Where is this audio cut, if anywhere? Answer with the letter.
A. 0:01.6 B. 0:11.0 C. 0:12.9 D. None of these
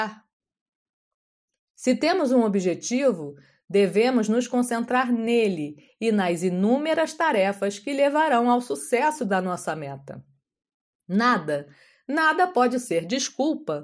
B